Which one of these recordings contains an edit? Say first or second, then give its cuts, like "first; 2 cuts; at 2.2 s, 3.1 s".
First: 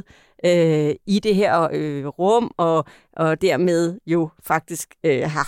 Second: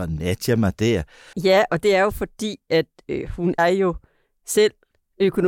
second; 2 cuts; at 1.3 s, 3.6 s